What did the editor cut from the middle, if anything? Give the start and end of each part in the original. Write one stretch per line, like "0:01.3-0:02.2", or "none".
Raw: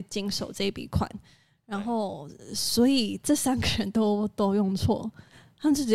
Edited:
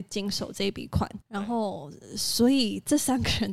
0:01.2-0:01.6